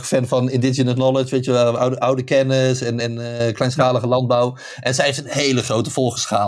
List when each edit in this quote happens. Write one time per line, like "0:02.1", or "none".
none

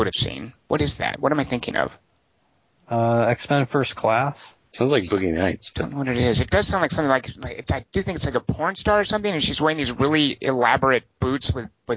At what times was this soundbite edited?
none

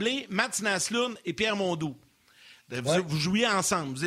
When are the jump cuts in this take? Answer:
none

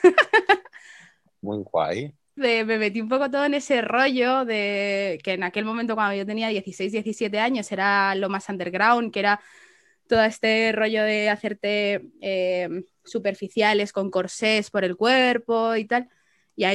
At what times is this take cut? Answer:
0:02.4

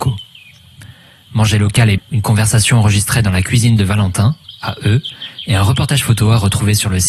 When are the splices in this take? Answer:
0:02.0

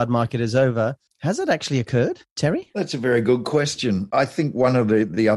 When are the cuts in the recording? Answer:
0:04.1

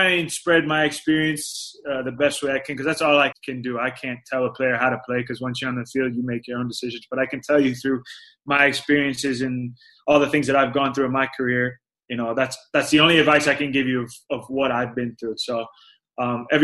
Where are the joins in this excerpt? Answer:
0:03.3

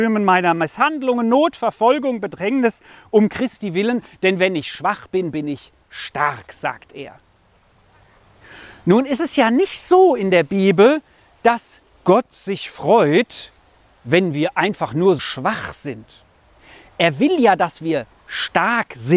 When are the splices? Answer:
0:15.2

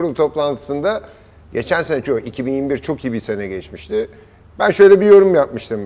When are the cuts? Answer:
0:02.0

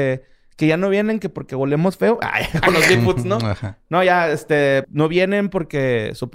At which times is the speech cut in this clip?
0:04.8

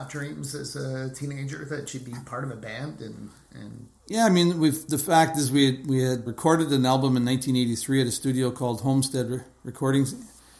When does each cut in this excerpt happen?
0:04.0
0:06.3

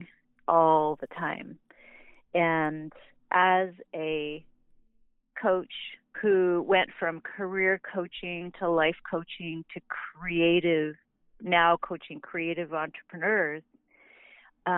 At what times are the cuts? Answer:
0:06.1

